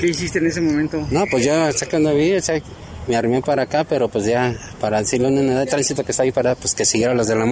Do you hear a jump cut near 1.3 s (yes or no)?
no